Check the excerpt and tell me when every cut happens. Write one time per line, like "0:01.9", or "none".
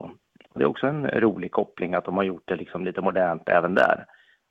none